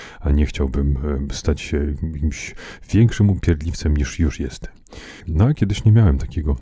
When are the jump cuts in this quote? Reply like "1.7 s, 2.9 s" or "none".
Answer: 5.2 s